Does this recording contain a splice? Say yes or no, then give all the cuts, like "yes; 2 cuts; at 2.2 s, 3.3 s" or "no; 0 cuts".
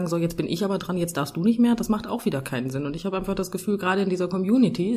no; 0 cuts